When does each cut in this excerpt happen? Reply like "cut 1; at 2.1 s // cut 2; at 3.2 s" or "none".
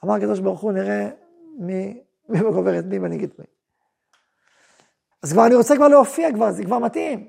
cut 1; at 2.3 s // cut 2; at 5.1 s